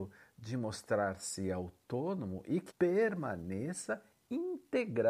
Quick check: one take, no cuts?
no; 1 cut; at 2.7 s

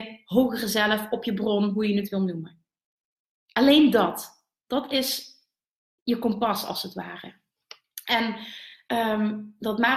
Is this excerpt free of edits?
yes; 0 cuts

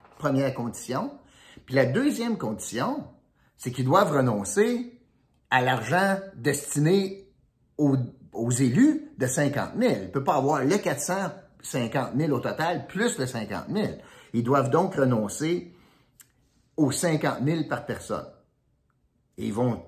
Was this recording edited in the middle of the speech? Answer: yes; 1 cut; at 8.3 s

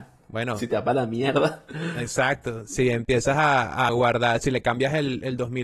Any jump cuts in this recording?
no; 0 cuts

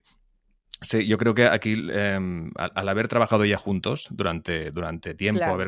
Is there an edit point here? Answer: no; 0 cuts

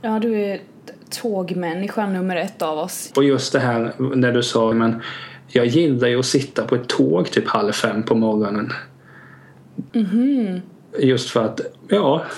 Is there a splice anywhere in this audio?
yes; 3 cuts; at 3.1 s, 4.7 s, 9.9 s

